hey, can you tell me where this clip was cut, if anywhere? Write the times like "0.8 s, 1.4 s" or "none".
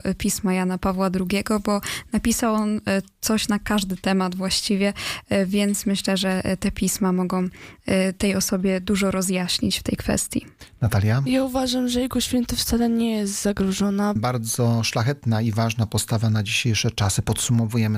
14.2 s